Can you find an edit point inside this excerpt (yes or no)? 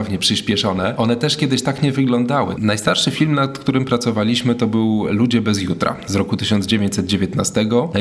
yes